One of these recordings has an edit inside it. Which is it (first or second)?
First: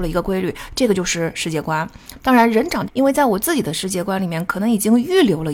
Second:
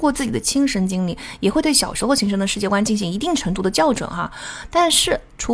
first